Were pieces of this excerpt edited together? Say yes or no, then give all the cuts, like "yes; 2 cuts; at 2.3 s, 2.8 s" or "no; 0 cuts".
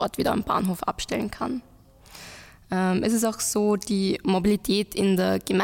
no; 0 cuts